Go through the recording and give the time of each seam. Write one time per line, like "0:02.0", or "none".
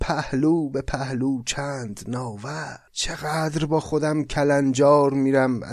0:02.9